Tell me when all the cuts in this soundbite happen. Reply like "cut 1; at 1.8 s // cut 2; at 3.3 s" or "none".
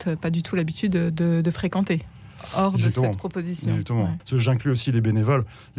cut 1; at 4.2 s